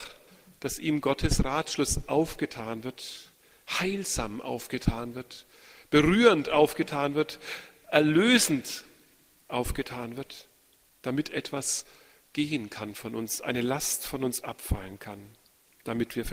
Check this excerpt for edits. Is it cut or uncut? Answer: uncut